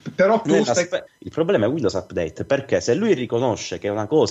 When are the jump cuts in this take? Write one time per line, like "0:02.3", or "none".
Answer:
0:01.1